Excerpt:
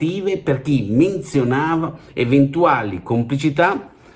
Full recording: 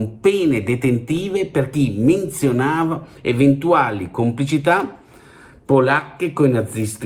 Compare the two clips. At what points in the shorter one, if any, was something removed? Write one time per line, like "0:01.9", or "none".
none